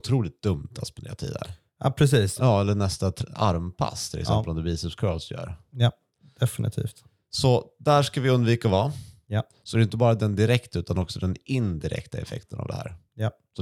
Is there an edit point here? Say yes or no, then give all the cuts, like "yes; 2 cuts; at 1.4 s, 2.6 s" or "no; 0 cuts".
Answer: yes; 2 cuts; at 2.4 s, 9.2 s